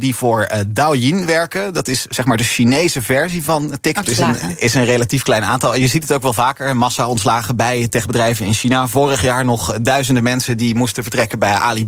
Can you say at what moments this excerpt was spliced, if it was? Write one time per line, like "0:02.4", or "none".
0:04.0